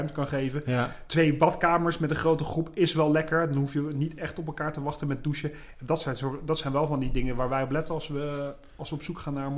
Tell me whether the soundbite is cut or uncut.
uncut